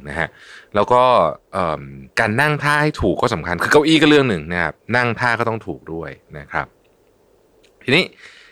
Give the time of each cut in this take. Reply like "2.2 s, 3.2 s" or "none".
2.1 s